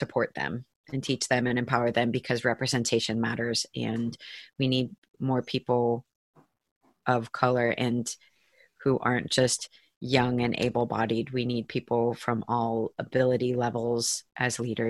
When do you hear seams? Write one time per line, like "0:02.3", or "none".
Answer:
none